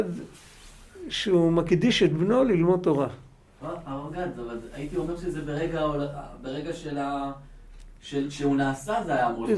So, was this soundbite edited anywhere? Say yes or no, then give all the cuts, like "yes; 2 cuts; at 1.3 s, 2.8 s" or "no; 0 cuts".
yes; 1 cut; at 3.6 s